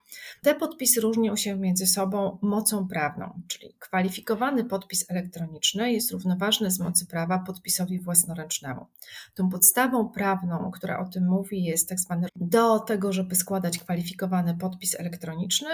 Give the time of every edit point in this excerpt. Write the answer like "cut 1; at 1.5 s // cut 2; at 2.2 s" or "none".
cut 1; at 12.3 s